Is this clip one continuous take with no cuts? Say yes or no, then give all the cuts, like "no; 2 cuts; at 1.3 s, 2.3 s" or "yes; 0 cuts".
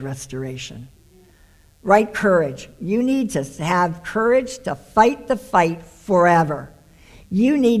yes; 0 cuts